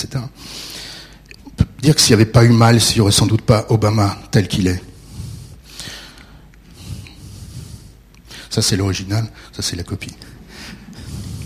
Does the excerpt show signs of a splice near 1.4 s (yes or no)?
yes